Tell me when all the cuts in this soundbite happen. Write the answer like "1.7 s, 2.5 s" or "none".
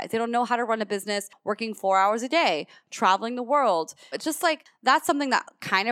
4.1 s